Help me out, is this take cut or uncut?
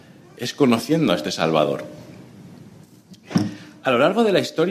uncut